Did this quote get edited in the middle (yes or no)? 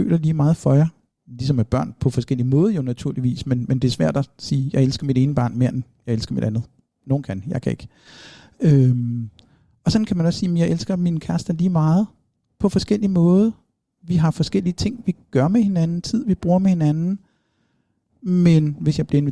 no